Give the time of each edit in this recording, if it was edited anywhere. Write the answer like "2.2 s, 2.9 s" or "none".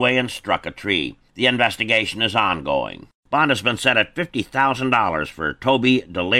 3.2 s